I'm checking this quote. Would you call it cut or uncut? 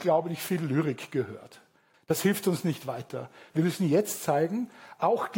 cut